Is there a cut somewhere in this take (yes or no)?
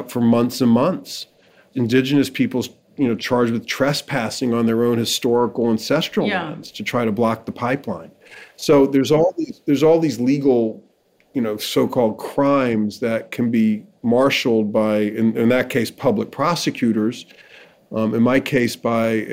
no